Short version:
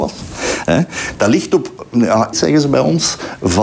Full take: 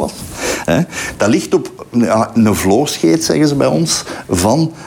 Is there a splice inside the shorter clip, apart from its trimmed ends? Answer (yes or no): yes